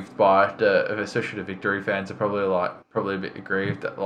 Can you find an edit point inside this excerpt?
yes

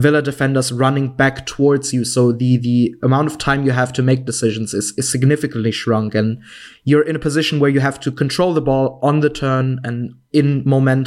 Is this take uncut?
yes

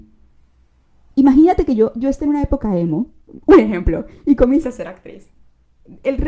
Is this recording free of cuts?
yes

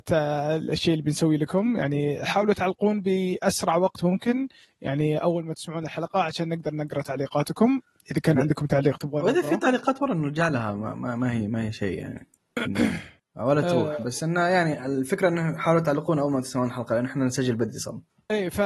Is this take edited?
no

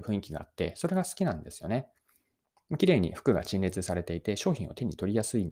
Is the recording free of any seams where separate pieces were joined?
yes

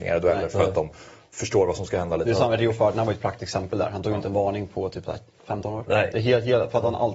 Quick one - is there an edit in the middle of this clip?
no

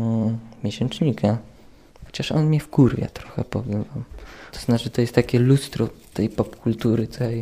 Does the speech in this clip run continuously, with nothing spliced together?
no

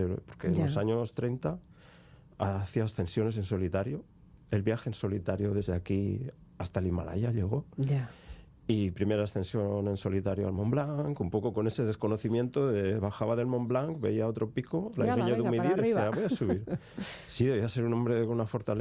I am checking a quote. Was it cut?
no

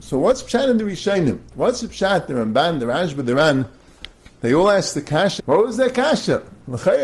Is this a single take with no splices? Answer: no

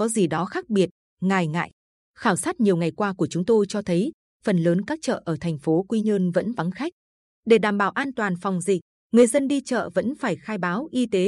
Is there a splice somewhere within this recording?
no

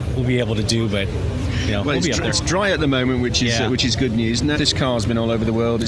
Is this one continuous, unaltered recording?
no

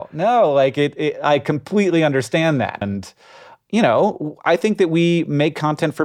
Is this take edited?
yes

